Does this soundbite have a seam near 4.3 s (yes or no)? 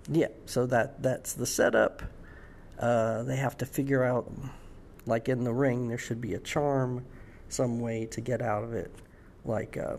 yes